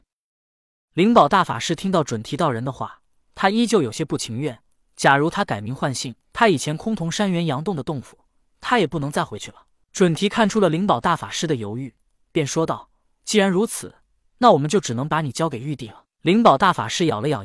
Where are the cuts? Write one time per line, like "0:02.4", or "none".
0:06.2
0:09.8